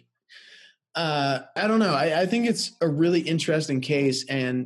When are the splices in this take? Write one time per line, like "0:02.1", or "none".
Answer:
0:01.6